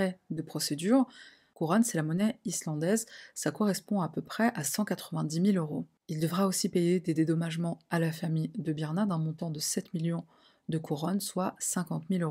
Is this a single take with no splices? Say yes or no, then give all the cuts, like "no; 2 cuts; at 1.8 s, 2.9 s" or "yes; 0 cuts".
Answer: yes; 0 cuts